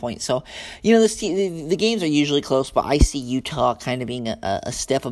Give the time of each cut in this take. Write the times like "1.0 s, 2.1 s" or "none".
none